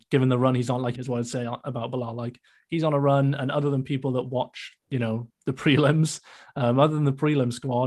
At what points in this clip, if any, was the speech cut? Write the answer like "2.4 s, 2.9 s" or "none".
1.0 s, 5.3 s